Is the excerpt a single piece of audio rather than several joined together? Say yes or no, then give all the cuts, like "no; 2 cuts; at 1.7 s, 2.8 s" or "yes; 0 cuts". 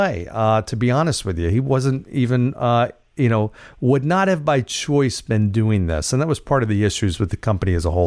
yes; 0 cuts